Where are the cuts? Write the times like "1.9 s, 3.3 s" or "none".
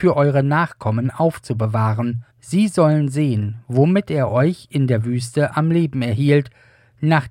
2.3 s